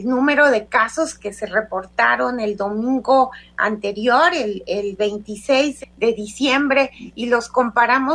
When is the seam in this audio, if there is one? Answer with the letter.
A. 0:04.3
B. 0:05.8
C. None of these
B